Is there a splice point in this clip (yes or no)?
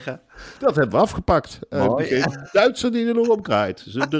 no